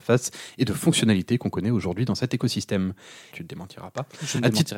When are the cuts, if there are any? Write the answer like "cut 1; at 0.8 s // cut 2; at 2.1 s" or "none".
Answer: cut 1; at 3.3 s